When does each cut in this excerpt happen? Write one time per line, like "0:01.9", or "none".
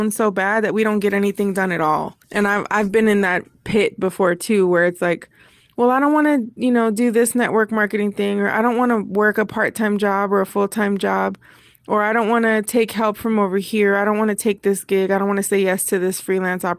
0:02.2